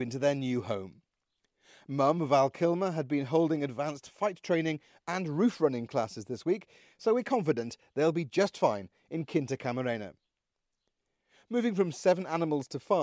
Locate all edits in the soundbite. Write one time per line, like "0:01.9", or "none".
none